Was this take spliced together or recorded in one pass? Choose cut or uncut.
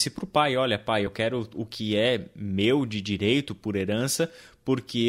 uncut